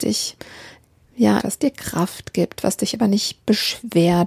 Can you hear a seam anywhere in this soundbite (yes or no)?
yes